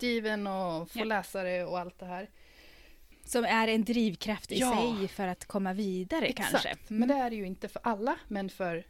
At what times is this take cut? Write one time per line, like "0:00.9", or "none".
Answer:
none